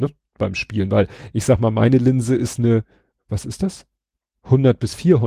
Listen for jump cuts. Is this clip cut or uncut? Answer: uncut